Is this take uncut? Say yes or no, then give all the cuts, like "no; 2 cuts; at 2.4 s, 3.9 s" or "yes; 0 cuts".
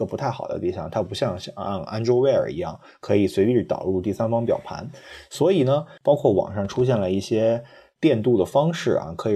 no; 1 cut; at 6.0 s